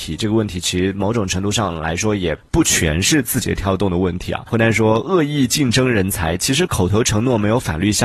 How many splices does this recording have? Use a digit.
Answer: 0